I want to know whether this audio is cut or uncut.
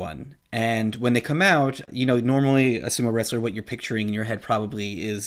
uncut